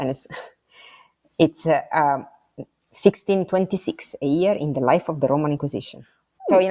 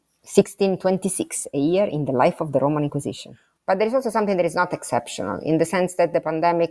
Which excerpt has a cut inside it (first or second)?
second